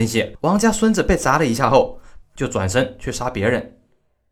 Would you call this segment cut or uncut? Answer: cut